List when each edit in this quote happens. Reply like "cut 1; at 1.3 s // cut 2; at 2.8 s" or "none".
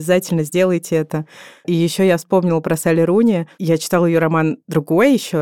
none